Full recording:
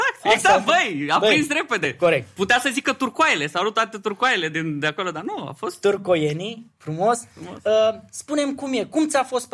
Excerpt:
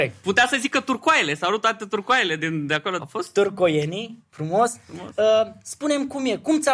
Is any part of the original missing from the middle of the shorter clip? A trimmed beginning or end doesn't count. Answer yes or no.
yes